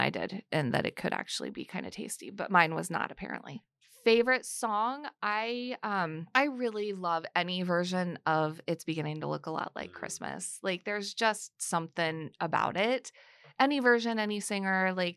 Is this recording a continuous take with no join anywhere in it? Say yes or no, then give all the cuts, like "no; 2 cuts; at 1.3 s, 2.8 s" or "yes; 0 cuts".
yes; 0 cuts